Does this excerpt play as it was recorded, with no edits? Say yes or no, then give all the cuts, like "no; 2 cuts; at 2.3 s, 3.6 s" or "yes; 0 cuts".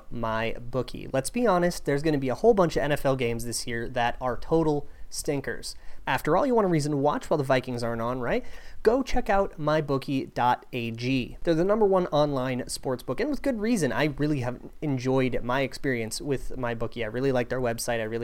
no; 1 cut; at 6.0 s